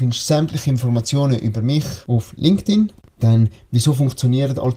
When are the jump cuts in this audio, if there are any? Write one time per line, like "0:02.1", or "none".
0:03.1